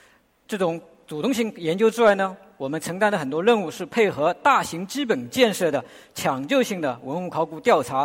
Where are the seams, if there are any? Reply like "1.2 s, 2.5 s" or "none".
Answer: none